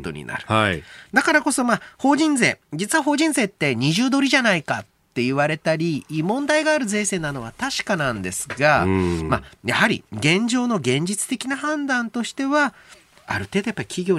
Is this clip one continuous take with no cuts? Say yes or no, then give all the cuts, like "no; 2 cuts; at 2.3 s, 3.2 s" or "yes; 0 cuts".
yes; 0 cuts